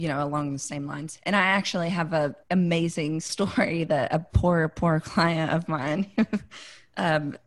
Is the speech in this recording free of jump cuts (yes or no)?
no